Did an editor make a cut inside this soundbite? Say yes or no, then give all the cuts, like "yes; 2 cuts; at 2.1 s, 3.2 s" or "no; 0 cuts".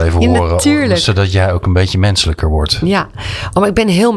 no; 0 cuts